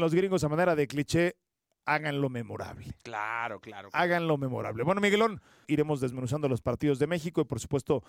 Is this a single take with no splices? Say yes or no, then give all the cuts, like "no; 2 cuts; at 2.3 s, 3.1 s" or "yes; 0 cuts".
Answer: no; 1 cut; at 5.6 s